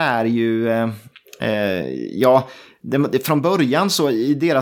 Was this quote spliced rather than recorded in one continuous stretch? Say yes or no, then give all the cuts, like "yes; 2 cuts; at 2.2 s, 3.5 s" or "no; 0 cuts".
no; 0 cuts